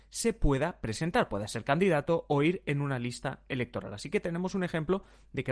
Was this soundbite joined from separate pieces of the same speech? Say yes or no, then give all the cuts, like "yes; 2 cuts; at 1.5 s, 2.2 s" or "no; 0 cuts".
no; 0 cuts